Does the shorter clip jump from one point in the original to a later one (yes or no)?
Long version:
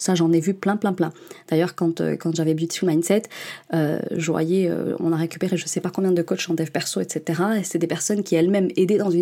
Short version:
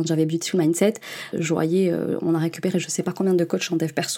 yes